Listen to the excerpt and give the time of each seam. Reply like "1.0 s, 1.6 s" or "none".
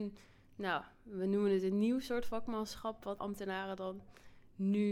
3.2 s